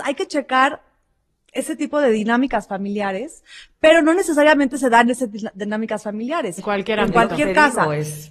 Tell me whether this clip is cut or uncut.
cut